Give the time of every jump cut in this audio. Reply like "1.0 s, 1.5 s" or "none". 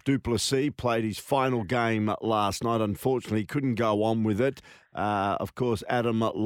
none